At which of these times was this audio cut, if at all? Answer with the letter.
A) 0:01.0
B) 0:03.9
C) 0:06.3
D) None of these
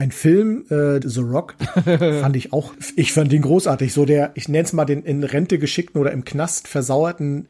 A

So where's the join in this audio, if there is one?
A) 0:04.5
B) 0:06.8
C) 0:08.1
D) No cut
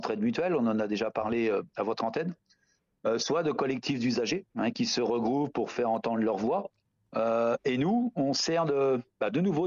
A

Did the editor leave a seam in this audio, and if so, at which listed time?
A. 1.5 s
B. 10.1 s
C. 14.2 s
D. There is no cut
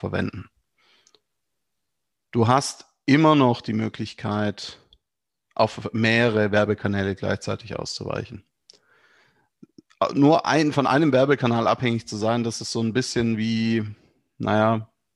D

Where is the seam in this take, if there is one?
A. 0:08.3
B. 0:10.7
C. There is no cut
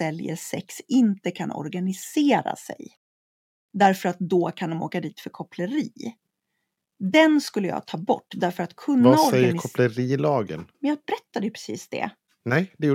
B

